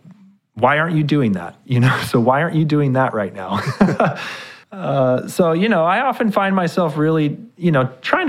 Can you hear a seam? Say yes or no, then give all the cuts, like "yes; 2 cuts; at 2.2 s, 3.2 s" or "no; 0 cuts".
no; 0 cuts